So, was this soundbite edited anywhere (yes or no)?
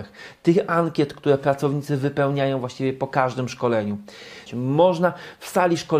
yes